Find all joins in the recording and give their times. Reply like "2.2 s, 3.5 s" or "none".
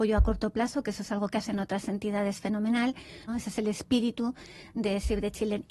3.3 s